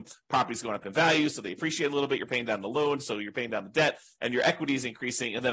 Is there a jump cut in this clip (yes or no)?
no